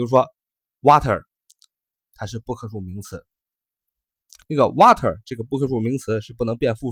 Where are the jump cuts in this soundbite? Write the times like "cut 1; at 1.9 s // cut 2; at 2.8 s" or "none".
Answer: cut 1; at 2.1 s // cut 2; at 4.4 s